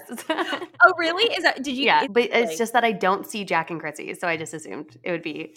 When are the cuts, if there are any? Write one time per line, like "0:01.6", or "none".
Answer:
0:02.0